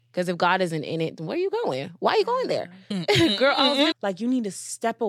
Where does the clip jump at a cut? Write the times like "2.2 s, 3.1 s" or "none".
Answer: 2.9 s, 3.9 s